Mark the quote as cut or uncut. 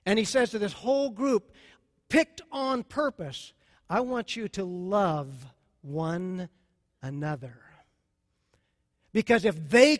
uncut